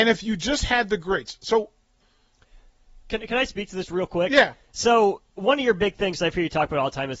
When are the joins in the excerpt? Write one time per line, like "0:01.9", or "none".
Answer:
none